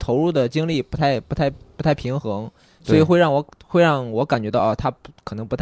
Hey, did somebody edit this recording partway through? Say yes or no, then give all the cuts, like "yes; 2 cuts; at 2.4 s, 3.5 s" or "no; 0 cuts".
no; 0 cuts